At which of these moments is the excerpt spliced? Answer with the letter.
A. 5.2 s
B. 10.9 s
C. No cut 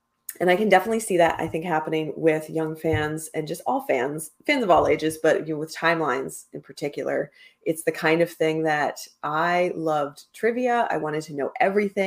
C